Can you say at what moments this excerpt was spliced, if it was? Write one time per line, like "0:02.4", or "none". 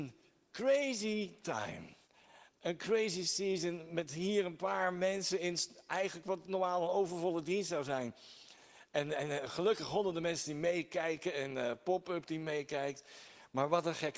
none